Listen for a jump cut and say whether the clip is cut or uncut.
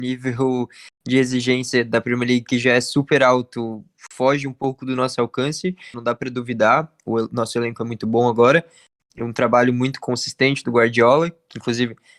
cut